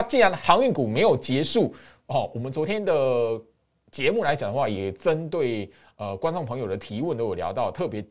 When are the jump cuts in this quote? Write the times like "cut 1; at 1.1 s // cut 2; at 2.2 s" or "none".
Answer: none